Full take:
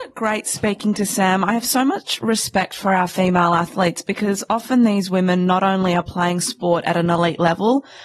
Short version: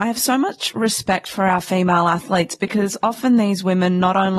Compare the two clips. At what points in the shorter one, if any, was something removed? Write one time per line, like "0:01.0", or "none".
none